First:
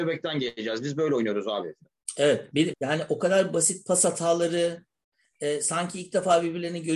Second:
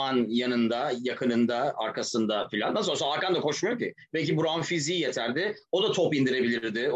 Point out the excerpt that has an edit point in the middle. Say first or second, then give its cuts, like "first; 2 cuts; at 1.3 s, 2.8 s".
first; 1 cut; at 2.7 s